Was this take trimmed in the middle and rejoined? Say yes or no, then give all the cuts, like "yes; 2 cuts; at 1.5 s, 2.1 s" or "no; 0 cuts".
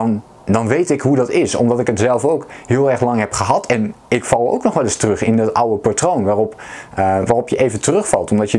no; 0 cuts